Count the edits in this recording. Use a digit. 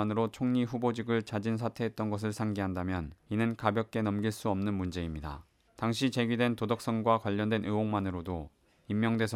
2